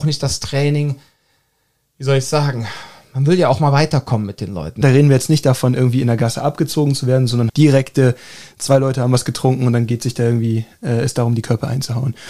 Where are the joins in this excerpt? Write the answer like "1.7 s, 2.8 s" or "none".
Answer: 4.8 s, 7.5 s